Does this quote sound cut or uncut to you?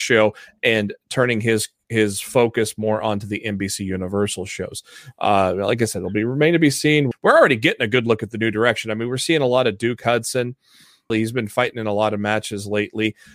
cut